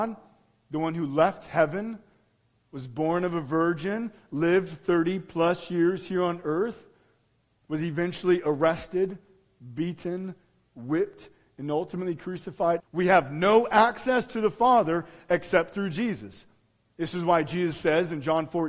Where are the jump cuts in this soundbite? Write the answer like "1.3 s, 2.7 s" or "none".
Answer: 12.8 s